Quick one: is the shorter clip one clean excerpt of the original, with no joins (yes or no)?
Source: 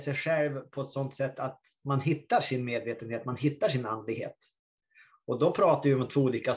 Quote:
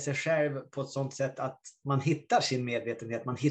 yes